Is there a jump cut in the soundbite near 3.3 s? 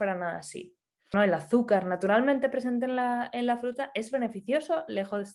no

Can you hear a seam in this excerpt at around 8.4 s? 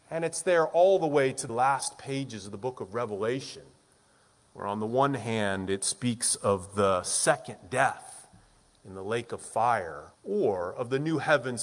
no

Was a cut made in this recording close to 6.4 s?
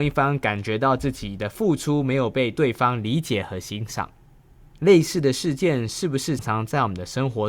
yes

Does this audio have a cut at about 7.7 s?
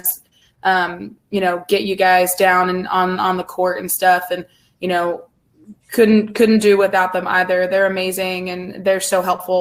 no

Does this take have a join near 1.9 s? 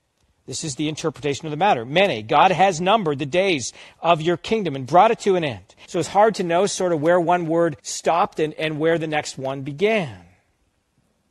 no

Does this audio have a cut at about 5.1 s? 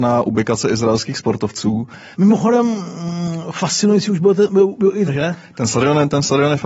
yes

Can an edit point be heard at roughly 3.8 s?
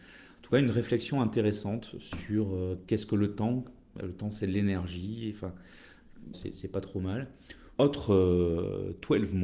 no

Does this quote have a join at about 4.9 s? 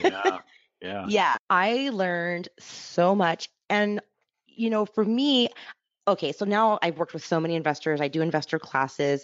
no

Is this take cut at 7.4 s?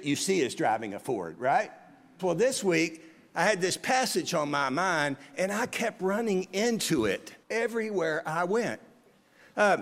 yes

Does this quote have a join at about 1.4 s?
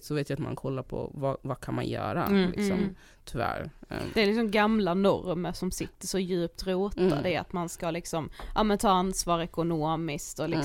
no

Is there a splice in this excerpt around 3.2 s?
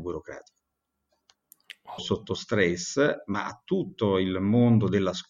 no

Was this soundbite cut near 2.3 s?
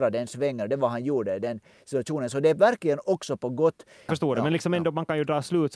no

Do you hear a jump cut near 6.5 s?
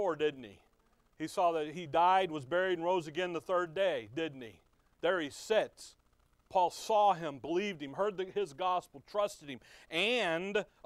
yes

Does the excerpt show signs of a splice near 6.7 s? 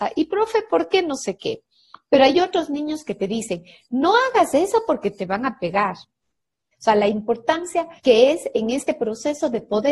yes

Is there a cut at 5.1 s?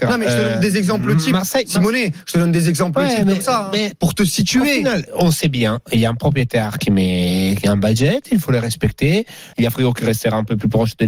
yes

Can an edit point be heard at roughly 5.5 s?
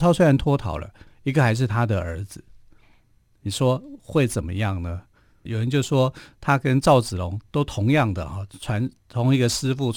yes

